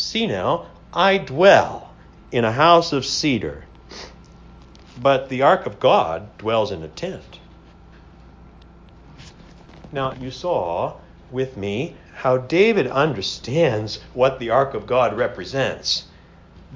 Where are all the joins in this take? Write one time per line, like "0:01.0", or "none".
0:10.1
0:12.1